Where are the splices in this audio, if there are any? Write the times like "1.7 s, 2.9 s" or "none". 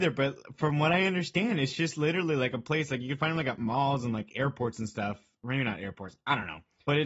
none

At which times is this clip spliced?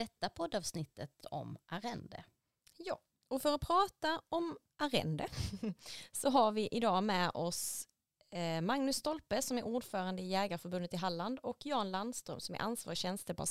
1.2 s

